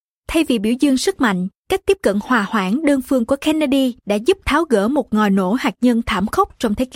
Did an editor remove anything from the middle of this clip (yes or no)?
no